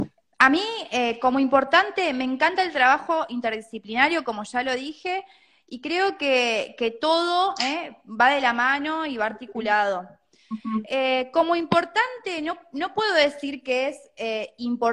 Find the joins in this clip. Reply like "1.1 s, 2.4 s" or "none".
none